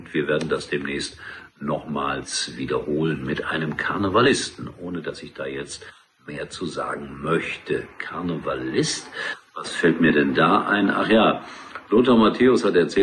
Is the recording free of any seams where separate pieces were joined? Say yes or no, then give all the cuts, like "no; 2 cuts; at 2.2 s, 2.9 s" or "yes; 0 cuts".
yes; 0 cuts